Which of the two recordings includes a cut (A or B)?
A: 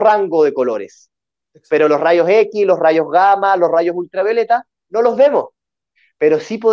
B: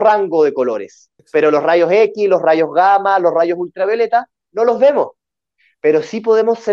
B